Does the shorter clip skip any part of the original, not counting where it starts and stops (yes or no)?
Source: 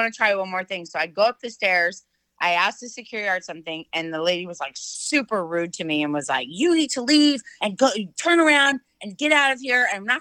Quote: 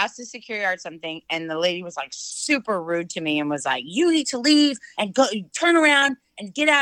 no